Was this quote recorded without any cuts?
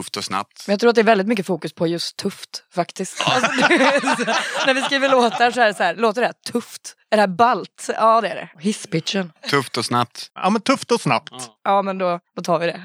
no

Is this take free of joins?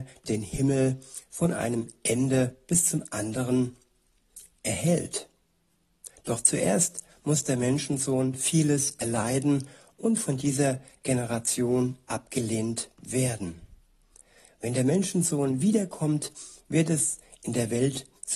yes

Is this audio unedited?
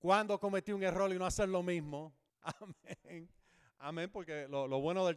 yes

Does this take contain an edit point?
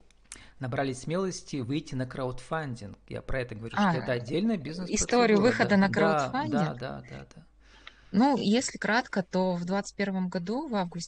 no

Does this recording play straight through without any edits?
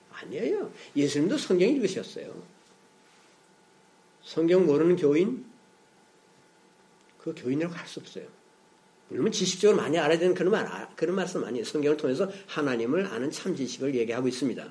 no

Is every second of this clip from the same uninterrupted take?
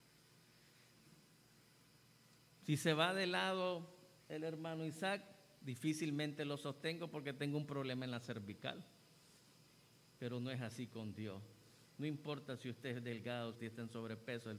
no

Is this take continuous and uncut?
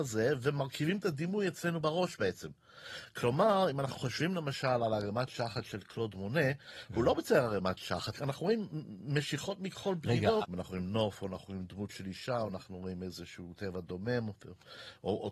no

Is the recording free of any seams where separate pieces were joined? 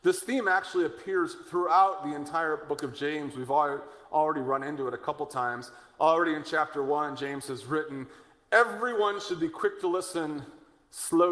yes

